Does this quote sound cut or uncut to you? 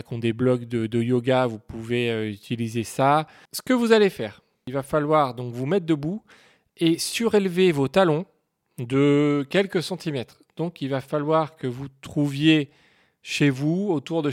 cut